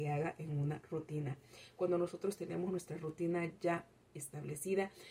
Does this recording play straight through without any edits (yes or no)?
yes